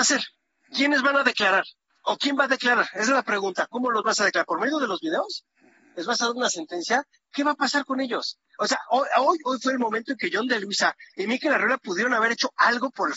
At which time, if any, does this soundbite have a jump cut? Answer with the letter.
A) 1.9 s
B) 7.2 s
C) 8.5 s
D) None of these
A